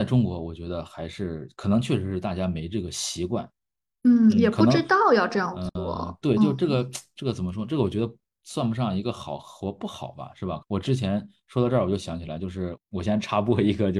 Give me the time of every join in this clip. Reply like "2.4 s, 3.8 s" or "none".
10.6 s